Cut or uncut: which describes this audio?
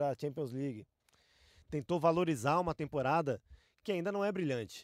uncut